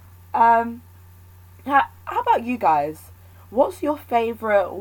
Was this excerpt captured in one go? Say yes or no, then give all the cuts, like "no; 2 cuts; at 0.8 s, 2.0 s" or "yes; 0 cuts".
yes; 0 cuts